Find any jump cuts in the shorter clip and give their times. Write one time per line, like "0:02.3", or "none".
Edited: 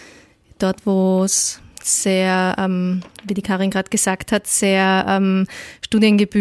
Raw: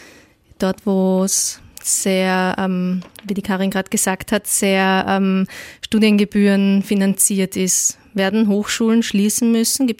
none

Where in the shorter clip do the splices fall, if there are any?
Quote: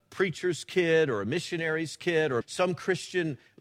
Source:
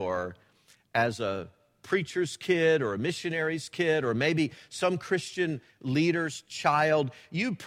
0:02.4

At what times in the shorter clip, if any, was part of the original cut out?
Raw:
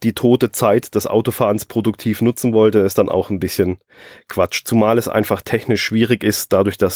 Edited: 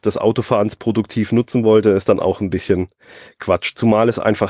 none

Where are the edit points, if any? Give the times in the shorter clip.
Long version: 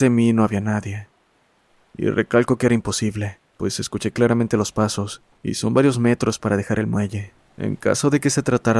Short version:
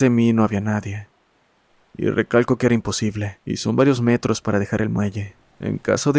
0:03.4

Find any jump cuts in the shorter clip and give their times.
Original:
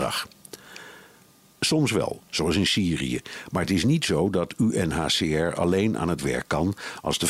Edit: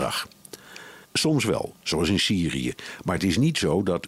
0:01.0

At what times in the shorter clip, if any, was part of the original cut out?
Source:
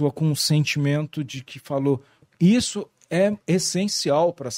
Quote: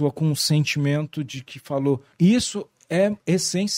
0:02.1

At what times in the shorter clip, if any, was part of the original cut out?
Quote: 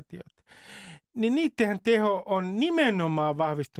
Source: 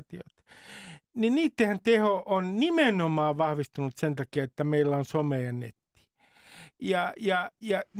none

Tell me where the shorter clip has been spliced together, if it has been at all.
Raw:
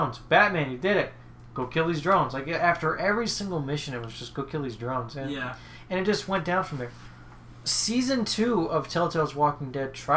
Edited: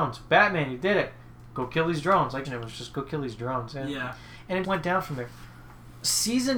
0:02.4
0:04.6

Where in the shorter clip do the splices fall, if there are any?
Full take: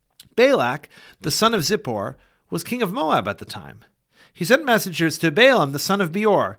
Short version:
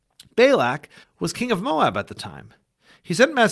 0:01.0

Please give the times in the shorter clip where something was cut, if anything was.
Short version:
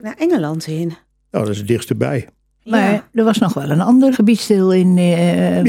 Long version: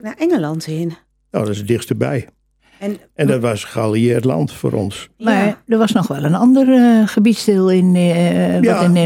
0:02.6
0:04.1

